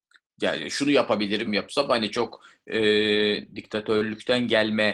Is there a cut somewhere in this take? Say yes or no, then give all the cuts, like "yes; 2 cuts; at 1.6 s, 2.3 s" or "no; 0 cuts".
yes; 1 cut; at 1.5 s